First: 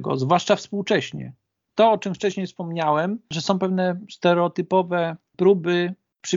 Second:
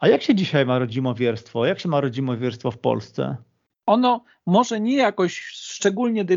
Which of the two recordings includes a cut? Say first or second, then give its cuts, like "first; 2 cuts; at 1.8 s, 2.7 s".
second; 1 cut; at 3.7 s